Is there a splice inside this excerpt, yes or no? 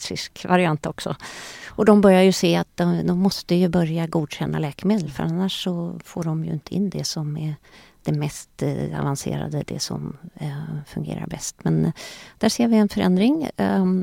no